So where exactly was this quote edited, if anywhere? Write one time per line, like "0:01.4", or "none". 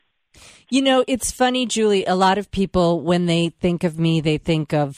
none